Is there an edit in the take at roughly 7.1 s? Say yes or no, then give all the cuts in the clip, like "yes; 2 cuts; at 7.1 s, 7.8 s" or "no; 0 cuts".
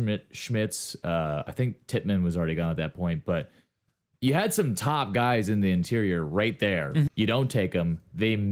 yes; 1 cut; at 7.1 s